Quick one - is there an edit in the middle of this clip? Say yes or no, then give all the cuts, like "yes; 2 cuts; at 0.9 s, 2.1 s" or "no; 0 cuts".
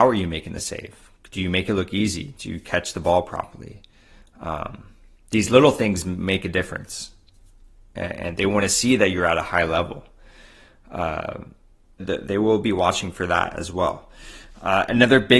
yes; 1 cut; at 12.0 s